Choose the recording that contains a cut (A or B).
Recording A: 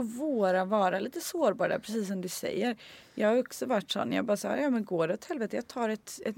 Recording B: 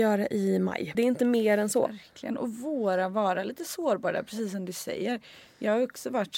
B